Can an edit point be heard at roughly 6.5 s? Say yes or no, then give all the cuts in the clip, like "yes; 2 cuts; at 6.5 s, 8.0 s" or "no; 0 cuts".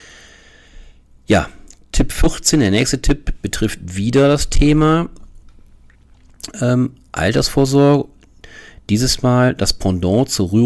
no; 0 cuts